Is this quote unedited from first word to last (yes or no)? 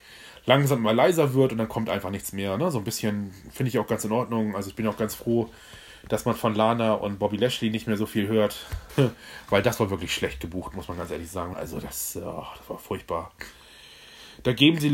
no